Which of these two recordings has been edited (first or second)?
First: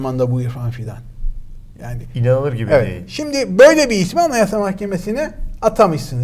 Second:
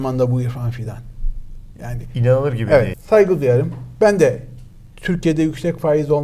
second